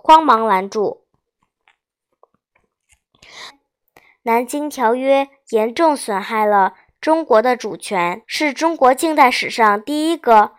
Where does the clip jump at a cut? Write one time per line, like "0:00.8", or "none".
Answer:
0:03.5
0:08.2

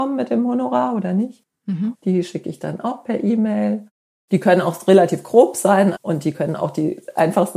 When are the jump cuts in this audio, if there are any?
0:01.9
0:05.9

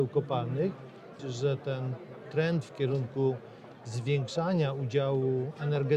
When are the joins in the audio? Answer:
0:01.2

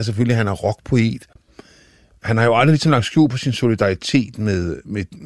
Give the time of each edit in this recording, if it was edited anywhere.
none

